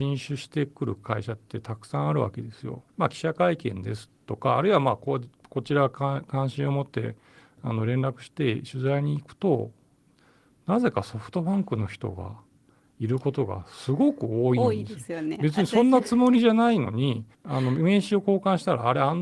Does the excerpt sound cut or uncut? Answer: cut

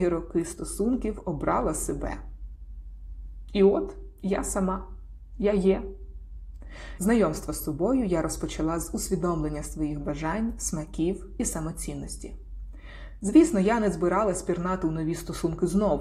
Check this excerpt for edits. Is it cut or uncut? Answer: cut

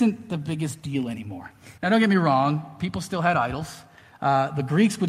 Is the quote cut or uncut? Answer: cut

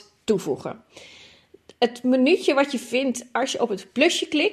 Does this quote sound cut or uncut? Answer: uncut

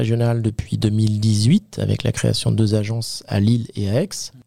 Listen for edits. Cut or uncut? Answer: uncut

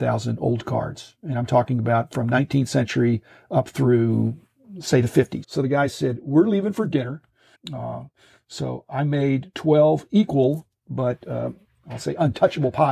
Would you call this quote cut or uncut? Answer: cut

